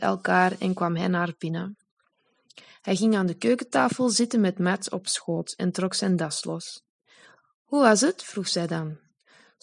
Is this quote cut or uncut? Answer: uncut